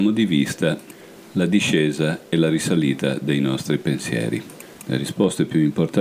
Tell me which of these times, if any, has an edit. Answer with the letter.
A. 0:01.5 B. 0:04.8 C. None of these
B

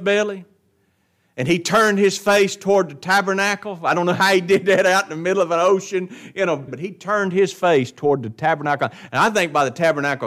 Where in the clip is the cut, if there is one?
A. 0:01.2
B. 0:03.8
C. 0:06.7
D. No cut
C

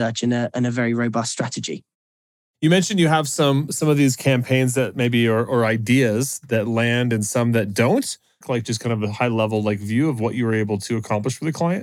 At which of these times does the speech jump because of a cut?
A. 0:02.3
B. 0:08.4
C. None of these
B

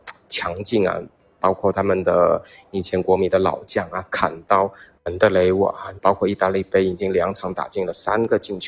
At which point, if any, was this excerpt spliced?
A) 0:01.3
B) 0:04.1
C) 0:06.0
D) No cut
C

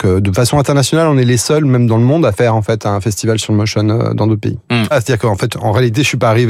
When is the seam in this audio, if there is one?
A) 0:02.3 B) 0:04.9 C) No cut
B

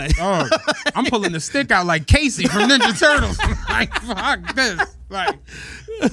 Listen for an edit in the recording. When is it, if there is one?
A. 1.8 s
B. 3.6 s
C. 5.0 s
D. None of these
D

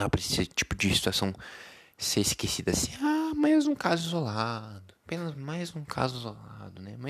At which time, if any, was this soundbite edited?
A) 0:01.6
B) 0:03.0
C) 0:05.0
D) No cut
C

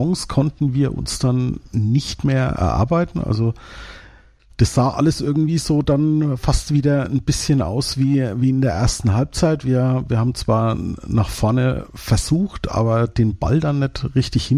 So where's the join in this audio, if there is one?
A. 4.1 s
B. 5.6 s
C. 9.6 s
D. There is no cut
D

